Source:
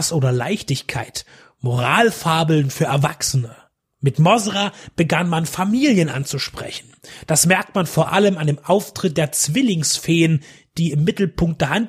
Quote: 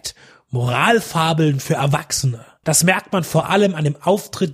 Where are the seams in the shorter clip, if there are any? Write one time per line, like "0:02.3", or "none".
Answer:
0:02.6